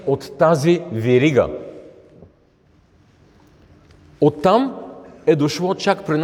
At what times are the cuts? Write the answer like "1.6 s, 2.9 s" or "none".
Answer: none